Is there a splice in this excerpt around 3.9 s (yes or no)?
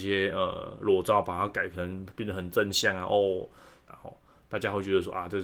yes